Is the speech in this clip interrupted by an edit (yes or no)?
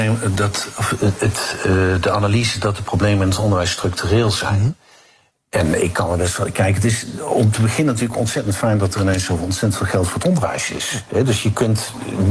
no